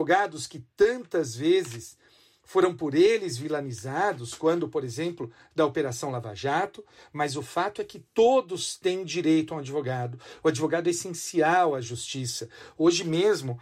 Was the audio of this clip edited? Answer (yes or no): no